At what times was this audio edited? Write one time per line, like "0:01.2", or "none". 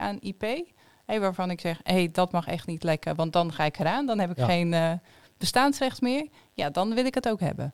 none